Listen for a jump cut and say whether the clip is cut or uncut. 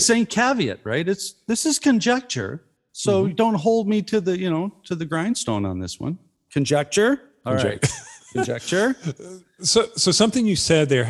cut